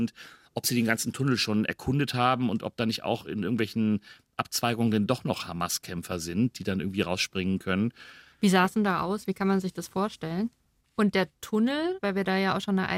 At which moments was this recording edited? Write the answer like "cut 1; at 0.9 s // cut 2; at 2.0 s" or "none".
cut 1; at 10.8 s // cut 2; at 12.0 s

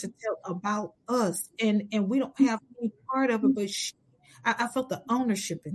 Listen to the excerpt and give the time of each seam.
none

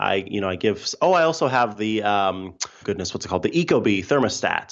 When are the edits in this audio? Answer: cut 1; at 2.8 s

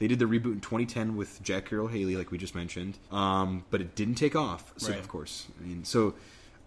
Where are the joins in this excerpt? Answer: cut 1; at 3.1 s // cut 2; at 4.9 s

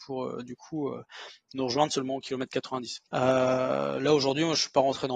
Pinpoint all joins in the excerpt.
cut 1; at 3.1 s

